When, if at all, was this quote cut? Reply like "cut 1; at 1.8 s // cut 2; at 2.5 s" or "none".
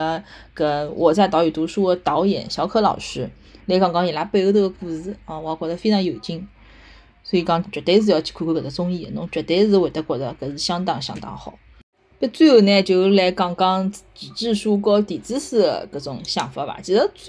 cut 1; at 7.6 s